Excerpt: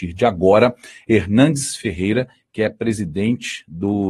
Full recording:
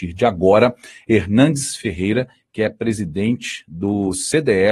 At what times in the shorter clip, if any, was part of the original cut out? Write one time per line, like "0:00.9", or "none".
none